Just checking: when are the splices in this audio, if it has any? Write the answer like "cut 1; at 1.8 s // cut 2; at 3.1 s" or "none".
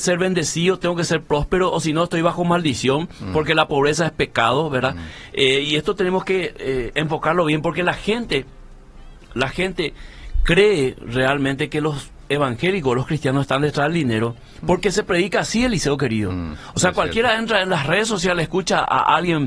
none